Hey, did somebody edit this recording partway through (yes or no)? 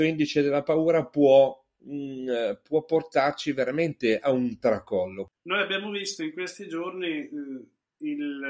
no